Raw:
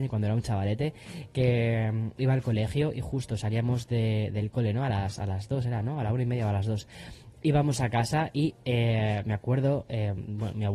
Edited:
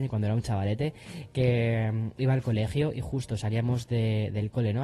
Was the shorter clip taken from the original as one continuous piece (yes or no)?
yes